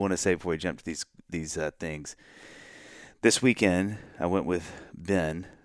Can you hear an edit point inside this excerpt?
no; 0 cuts

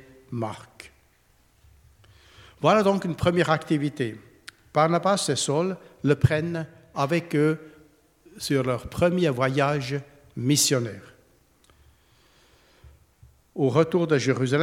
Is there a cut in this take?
no; 0 cuts

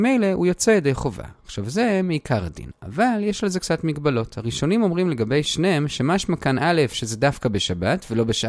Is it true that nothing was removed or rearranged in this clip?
yes; 0 cuts

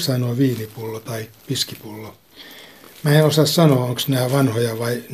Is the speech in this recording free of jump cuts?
yes; 0 cuts

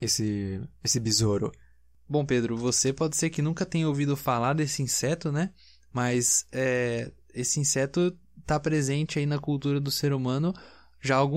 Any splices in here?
no; 0 cuts

